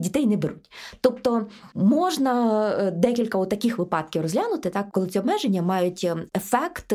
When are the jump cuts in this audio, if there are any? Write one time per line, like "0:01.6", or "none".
none